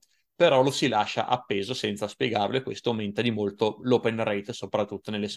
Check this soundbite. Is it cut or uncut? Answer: uncut